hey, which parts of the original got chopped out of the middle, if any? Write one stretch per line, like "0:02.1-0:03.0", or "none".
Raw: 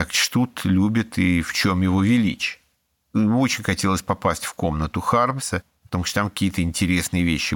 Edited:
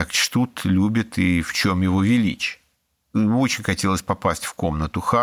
none